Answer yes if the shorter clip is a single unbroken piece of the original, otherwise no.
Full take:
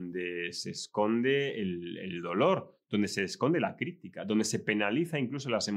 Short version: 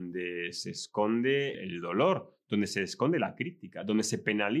no